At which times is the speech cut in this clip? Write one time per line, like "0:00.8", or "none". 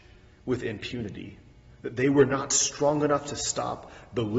0:01.7